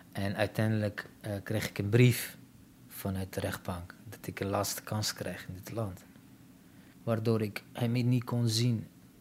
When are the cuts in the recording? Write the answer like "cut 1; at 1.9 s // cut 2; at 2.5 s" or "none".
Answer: cut 1; at 6.9 s